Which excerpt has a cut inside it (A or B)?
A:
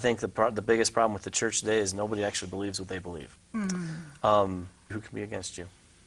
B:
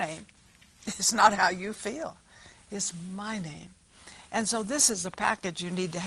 A